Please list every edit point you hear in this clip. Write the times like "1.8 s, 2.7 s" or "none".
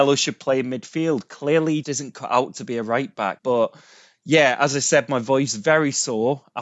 1.8 s, 3.4 s

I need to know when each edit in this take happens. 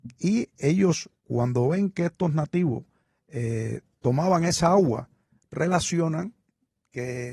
1.2 s

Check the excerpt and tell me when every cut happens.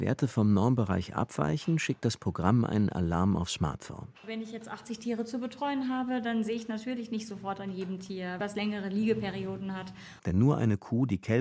8.4 s, 10.2 s

